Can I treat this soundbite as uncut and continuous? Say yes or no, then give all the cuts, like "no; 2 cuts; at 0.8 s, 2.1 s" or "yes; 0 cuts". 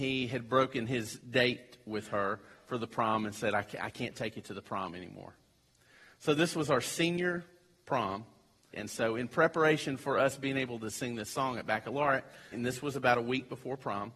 no; 2 cuts; at 8.7 s, 12.5 s